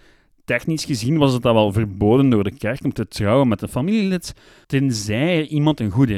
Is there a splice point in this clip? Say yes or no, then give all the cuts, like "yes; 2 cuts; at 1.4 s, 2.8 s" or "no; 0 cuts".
yes; 1 cut; at 4.6 s